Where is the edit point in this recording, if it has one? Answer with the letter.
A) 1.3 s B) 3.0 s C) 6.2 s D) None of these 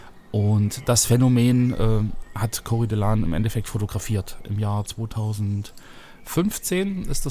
D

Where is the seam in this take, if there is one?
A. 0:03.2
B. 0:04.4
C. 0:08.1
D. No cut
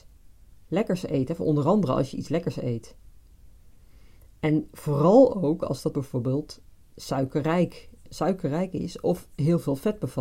C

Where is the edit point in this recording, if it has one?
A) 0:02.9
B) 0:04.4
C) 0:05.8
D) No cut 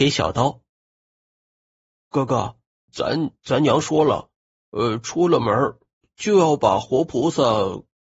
A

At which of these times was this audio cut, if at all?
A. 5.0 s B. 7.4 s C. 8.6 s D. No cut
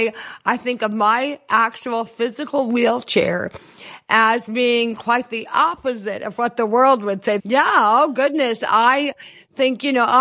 B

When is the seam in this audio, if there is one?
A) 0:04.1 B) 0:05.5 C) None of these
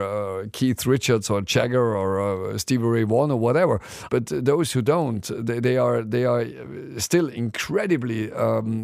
A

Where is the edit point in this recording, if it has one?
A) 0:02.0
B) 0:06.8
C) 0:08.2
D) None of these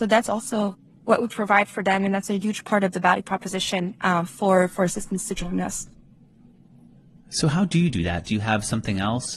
C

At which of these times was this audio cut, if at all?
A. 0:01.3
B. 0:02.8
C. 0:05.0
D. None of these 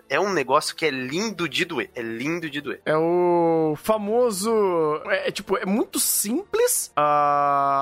C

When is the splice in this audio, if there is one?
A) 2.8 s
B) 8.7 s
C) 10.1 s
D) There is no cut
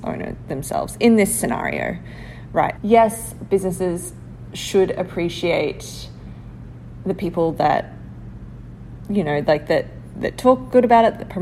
A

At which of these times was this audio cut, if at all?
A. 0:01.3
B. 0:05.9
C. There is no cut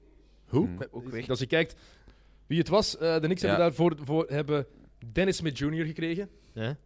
A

